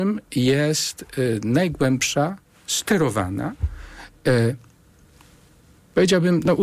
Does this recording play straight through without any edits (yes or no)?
yes